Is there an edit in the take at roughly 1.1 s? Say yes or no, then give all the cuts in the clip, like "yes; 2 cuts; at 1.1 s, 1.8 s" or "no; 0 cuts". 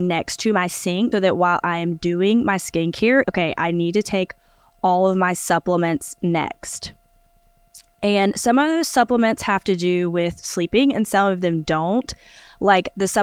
yes; 2 cuts; at 1.1 s, 3.2 s